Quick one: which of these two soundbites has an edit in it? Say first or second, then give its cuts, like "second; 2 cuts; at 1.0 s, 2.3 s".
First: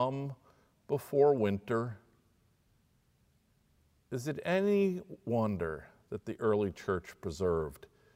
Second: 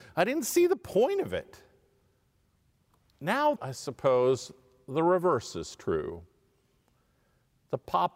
second; 1 cut; at 3.6 s